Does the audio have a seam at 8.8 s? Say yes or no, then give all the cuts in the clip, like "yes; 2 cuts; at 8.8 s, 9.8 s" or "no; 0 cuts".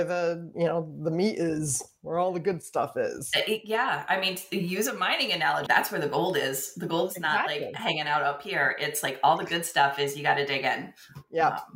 no; 1 cut; at 5.7 s